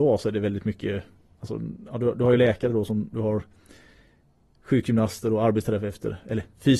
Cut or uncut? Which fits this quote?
cut